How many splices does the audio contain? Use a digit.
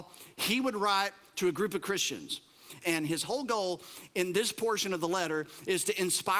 1